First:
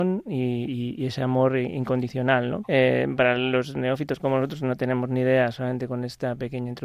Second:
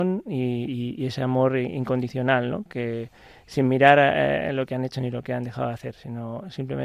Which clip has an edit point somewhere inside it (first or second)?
first